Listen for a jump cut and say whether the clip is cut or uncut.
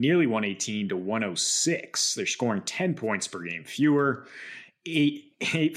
uncut